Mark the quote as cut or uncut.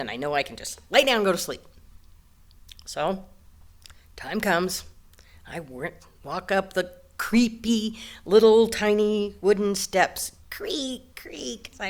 cut